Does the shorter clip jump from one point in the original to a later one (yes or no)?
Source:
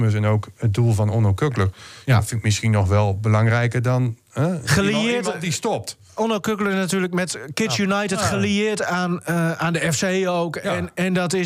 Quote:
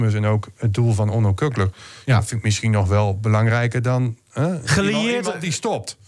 no